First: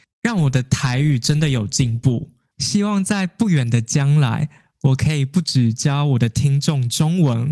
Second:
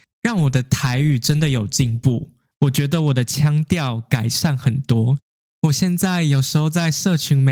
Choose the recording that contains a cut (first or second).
first